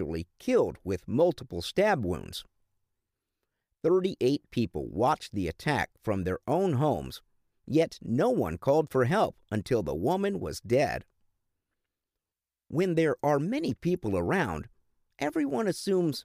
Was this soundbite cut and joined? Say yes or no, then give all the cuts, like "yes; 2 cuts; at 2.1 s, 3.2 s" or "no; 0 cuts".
no; 0 cuts